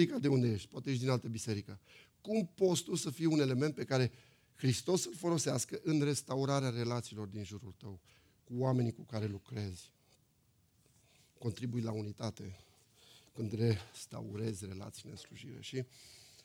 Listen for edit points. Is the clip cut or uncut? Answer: uncut